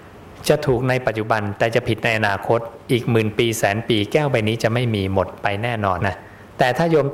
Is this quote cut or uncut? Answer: cut